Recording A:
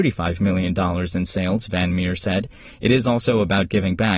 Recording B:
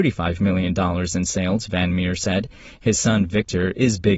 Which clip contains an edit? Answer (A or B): B